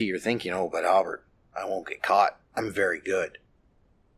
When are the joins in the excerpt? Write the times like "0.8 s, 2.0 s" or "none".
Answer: 2.5 s